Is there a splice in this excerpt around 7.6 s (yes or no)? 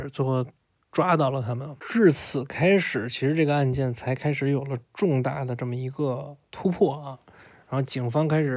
no